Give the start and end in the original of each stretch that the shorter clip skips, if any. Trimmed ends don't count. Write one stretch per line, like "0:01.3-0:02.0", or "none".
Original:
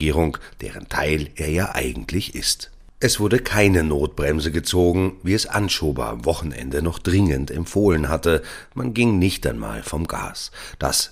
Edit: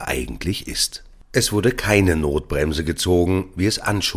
none